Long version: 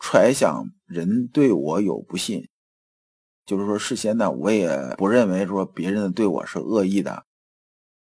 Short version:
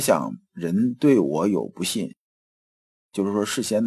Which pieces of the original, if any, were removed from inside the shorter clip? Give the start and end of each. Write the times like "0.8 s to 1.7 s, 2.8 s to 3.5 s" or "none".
none